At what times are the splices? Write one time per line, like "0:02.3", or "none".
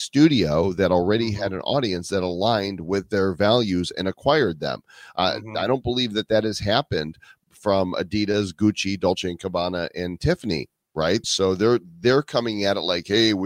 0:11.2